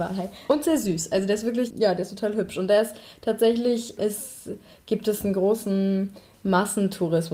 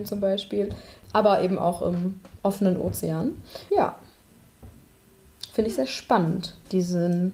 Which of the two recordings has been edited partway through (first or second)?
first